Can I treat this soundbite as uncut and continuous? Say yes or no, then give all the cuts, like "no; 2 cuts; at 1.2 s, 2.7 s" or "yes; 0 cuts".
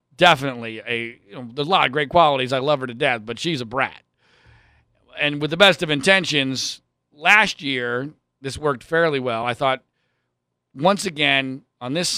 yes; 0 cuts